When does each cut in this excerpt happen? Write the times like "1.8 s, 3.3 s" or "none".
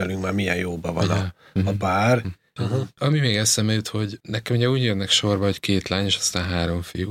2.6 s